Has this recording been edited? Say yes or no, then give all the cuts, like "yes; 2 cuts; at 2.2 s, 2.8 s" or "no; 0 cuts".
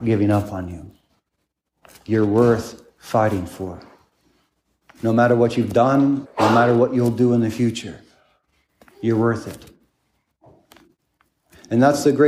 yes; 1 cut; at 6.2 s